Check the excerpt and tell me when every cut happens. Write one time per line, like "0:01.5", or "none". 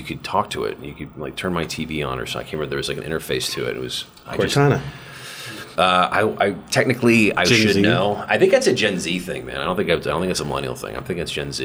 0:05.8